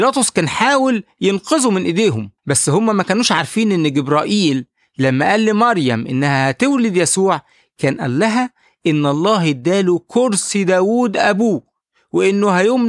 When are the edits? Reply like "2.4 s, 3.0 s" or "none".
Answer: 2.4 s

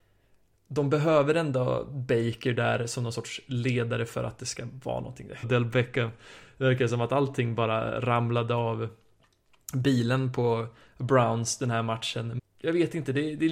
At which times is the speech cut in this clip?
5.4 s, 12.4 s

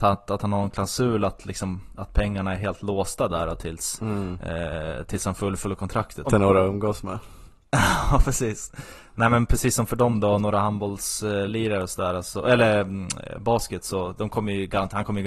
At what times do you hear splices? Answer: 1.9 s, 6.3 s

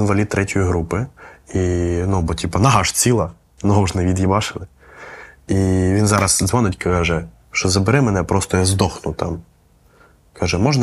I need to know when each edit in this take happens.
7.3 s

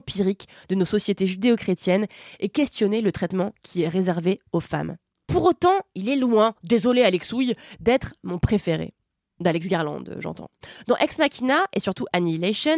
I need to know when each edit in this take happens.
5.2 s

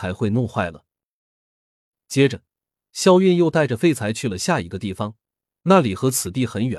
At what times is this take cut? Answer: none

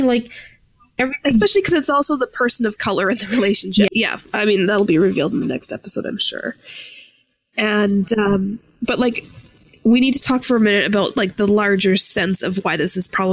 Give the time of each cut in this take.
3.9 s

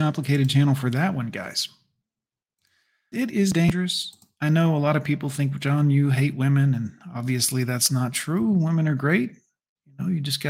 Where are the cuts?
3.1 s

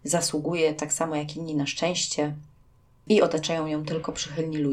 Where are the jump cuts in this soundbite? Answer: none

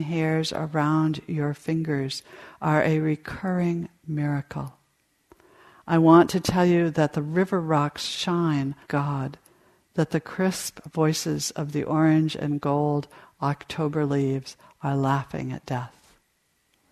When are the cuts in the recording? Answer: 8.8 s

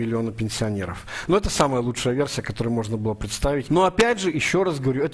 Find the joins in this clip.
3.7 s

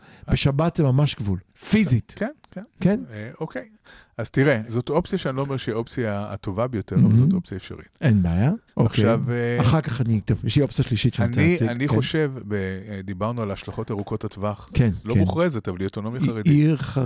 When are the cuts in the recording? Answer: 4.7 s, 8.7 s, 15.0 s

